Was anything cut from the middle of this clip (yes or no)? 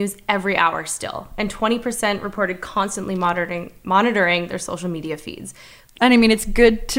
no